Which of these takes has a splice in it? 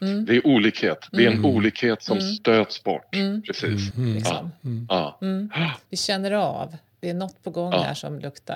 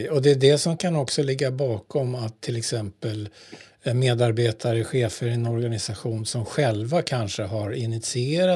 first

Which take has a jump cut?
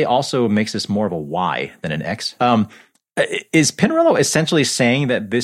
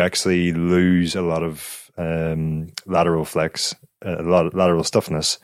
first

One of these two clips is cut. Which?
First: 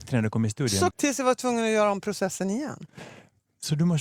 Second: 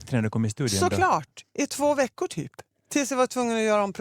first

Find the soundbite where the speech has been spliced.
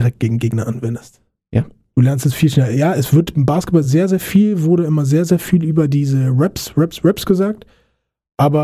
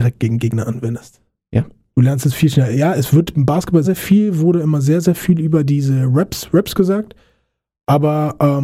second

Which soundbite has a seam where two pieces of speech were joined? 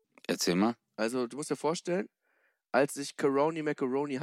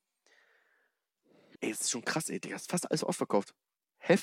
second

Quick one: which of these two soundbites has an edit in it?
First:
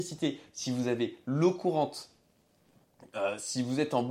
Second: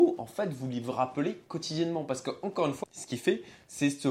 second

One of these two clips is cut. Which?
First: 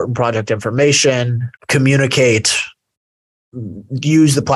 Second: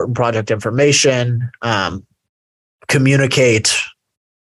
first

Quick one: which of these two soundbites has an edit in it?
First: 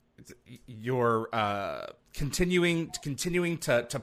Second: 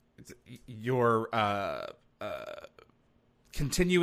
first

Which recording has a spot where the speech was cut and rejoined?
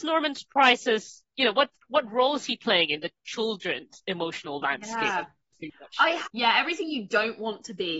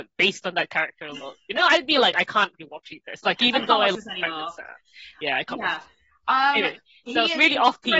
first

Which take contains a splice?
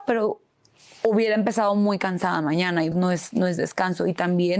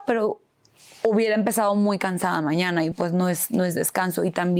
first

